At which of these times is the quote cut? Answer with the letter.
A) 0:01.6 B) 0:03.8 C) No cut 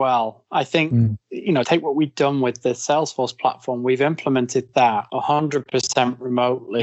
A